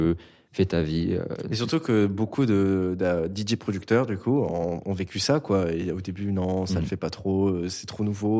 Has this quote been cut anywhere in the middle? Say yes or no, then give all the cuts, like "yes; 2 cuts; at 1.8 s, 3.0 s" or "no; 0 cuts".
no; 0 cuts